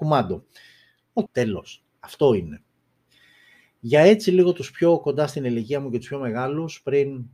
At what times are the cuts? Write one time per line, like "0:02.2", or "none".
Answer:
0:01.3